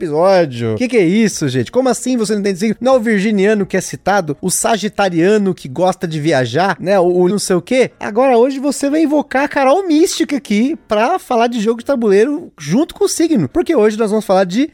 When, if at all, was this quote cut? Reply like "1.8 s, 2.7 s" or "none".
7.3 s